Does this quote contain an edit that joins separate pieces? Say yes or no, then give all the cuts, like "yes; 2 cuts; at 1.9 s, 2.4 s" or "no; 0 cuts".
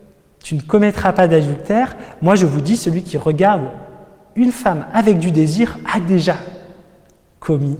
no; 0 cuts